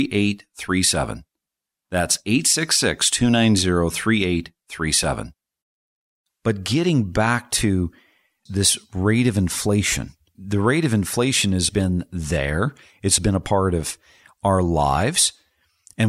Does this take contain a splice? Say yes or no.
yes